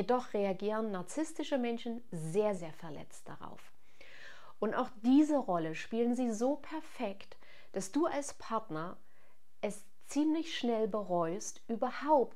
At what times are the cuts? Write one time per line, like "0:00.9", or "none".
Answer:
0:02.6